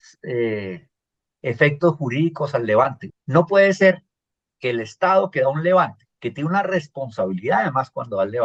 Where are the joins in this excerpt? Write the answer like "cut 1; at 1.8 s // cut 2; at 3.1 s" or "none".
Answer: cut 1; at 3.1 s // cut 2; at 6.1 s